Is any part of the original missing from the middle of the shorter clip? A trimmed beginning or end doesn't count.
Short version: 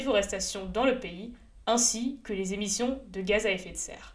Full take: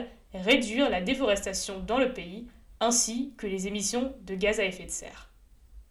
no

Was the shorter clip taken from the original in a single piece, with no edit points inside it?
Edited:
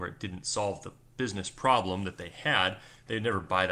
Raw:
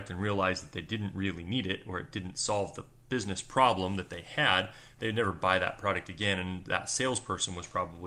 yes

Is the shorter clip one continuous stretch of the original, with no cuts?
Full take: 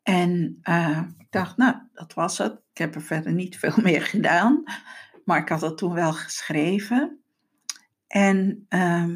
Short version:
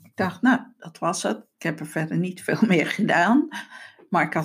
yes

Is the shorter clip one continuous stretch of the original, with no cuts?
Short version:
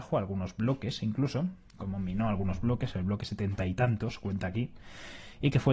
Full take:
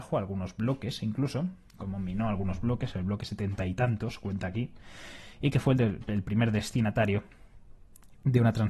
yes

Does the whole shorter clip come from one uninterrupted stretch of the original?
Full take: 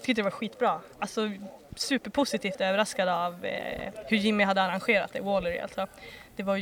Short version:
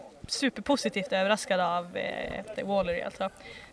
no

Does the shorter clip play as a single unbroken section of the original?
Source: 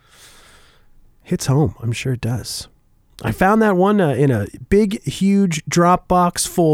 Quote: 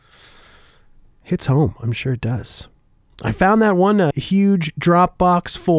no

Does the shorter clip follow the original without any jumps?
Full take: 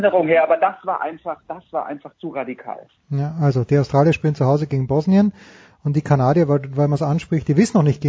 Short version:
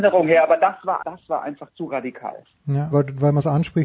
no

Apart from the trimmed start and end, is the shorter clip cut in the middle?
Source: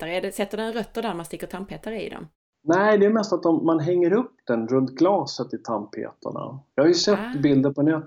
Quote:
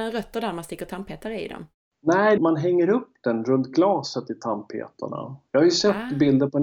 yes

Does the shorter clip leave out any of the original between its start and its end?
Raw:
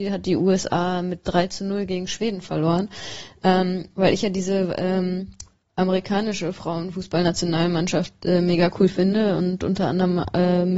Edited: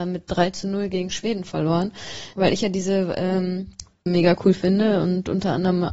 yes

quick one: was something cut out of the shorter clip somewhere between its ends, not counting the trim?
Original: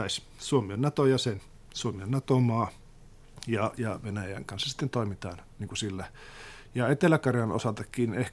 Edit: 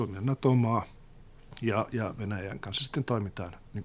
no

